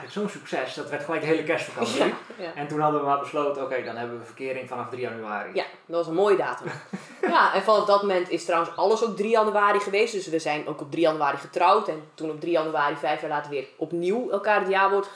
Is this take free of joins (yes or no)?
yes